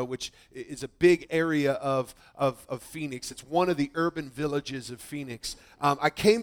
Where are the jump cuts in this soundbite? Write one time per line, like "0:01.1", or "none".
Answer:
none

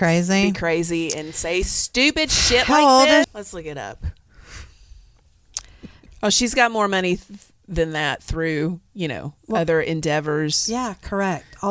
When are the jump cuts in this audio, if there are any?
0:03.2
0:06.1

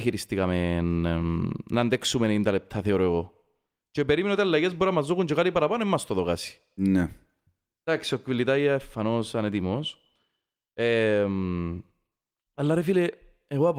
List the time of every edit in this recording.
none

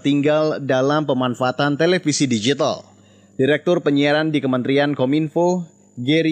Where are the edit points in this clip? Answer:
none

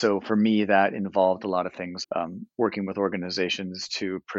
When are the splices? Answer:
0:02.0

